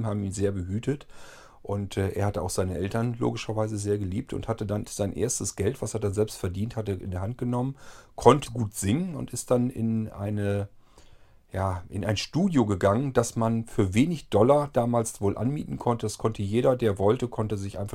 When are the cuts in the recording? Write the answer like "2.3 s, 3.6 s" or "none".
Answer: 4.8 s, 8.5 s